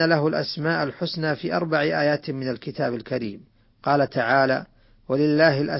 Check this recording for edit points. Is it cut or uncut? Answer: uncut